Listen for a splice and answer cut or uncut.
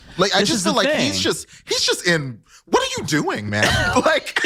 uncut